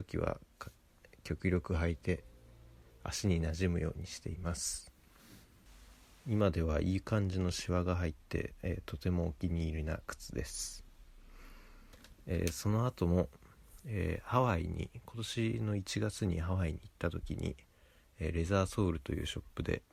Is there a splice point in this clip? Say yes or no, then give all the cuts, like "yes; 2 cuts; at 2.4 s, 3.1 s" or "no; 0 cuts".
no; 0 cuts